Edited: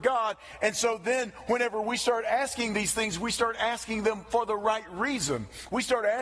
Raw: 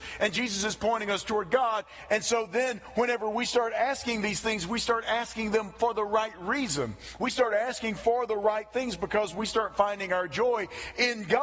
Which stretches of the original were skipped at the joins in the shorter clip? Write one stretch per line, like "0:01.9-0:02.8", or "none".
none